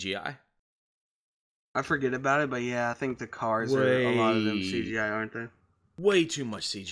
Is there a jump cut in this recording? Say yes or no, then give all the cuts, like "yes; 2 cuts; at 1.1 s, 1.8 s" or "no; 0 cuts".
no; 0 cuts